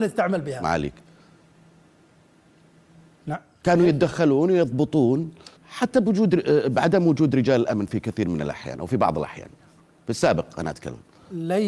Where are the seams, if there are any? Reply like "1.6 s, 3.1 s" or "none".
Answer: 5.6 s